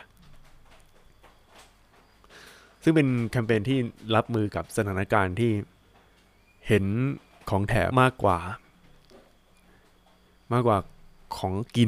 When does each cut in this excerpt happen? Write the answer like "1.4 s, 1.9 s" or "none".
7.9 s